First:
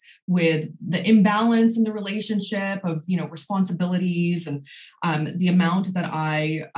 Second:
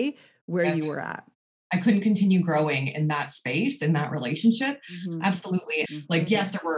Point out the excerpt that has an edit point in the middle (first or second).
second